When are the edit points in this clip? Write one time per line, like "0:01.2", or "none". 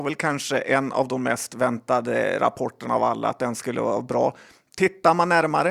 none